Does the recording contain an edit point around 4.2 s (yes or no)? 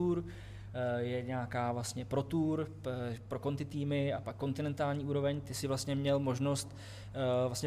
yes